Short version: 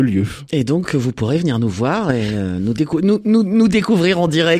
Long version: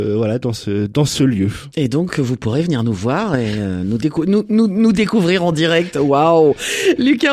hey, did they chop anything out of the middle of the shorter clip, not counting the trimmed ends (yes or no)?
no